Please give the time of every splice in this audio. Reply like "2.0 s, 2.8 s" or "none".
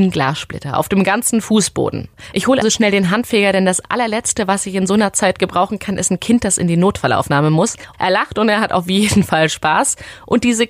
2.6 s, 7.9 s